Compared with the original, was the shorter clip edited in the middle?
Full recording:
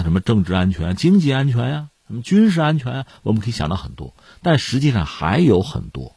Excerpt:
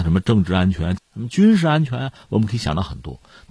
yes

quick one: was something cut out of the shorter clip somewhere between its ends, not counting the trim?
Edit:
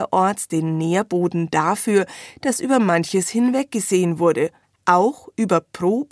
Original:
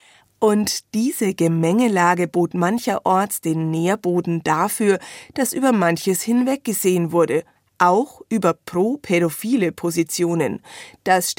no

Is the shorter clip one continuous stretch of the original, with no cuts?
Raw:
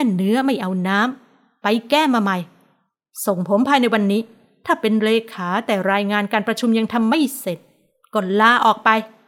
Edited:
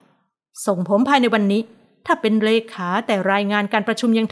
yes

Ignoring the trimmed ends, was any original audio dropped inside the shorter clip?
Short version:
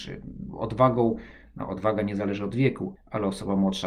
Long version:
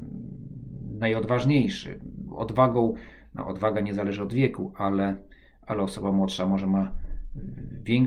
yes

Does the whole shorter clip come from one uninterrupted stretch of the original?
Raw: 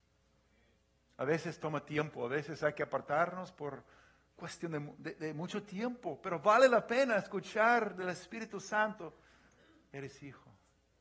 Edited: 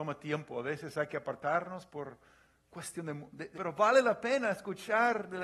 no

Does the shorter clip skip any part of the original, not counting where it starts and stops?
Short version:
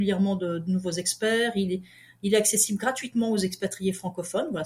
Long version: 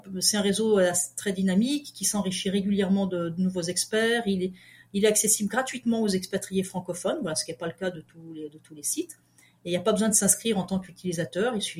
no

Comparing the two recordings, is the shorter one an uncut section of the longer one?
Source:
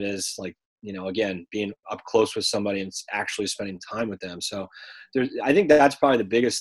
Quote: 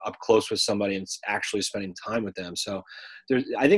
yes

